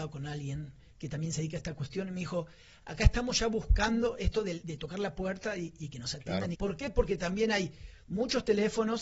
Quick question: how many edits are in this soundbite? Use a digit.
2